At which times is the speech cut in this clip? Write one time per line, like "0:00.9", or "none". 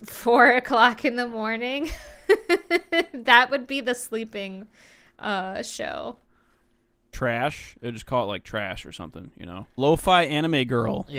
0:07.1
0:09.8